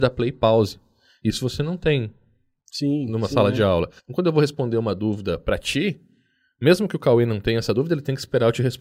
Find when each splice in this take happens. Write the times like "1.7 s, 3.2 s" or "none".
4.0 s